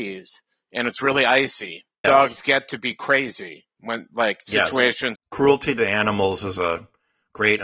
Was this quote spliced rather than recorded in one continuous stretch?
yes; 2 cuts; at 2.0 s, 5.2 s

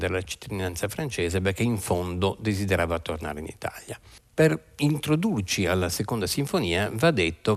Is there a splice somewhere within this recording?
no; 0 cuts

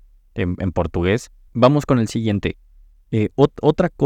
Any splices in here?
yes; 1 cut; at 1.5 s

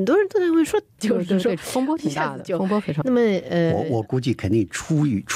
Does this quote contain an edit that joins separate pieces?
yes; 2 cuts; at 1.0 s, 3.0 s

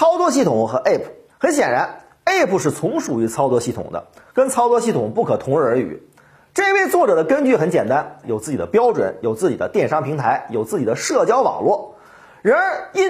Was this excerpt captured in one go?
no; 2 cuts; at 1.3 s, 8.2 s

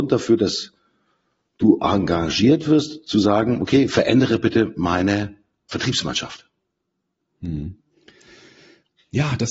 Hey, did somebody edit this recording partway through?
no; 0 cuts

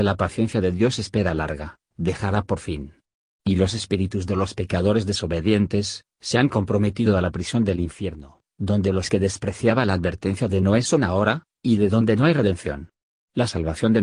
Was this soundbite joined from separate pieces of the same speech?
yes; 1 cut; at 6.1 s

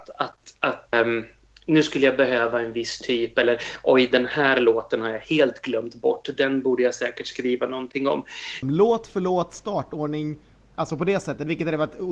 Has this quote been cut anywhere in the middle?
yes; 2 cuts; at 0.9 s, 8.6 s

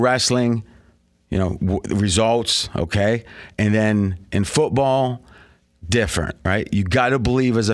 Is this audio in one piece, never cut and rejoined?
yes; 0 cuts

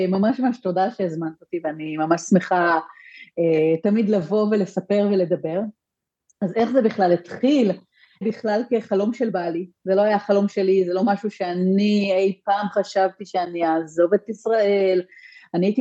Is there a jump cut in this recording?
yes; 1 cut; at 8.2 s

